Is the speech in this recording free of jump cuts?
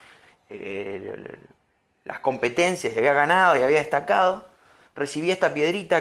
yes; 0 cuts

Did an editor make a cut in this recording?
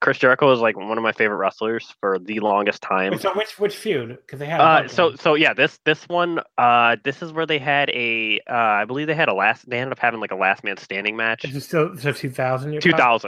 no; 0 cuts

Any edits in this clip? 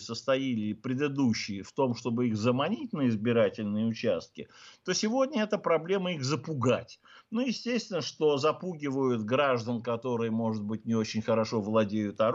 no; 0 cuts

